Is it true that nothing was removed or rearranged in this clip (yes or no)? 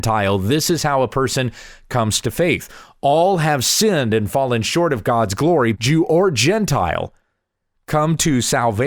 no